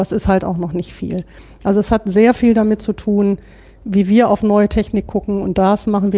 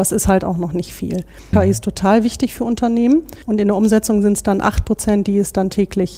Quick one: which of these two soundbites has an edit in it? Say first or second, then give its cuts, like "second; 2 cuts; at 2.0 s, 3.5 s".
second; 2 cuts; at 1.5 s, 3.4 s